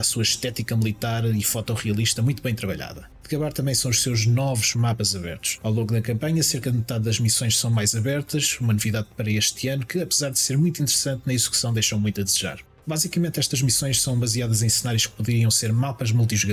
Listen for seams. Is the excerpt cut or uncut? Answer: uncut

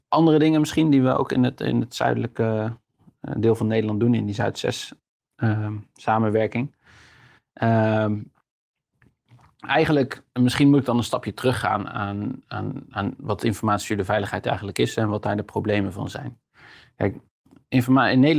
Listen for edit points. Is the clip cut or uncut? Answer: uncut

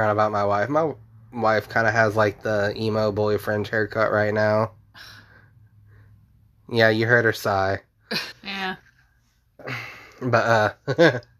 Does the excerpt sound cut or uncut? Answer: cut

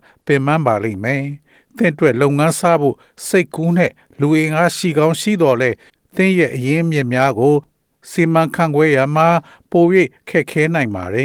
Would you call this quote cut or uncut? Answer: uncut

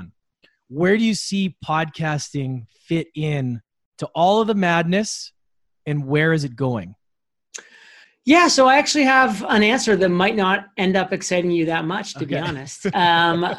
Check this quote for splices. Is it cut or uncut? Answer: uncut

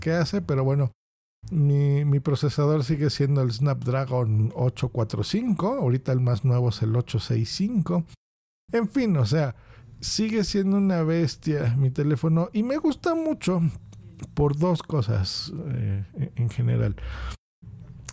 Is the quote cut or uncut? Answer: uncut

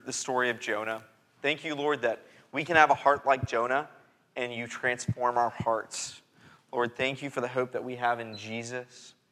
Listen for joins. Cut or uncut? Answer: uncut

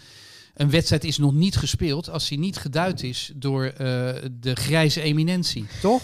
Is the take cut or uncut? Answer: uncut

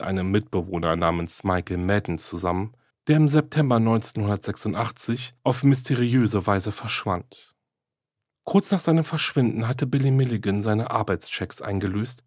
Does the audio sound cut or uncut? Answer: uncut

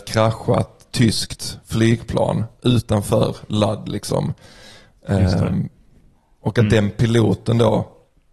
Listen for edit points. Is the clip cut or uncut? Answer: cut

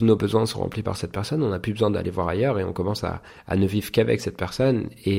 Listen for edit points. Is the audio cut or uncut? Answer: uncut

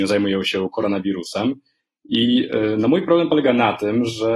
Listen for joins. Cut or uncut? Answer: uncut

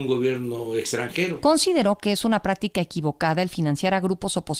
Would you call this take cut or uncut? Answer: uncut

